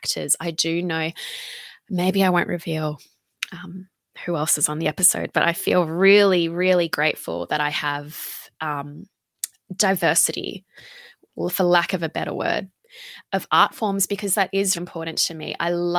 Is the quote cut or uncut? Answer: cut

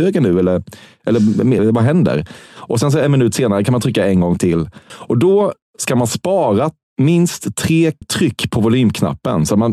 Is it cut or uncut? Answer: cut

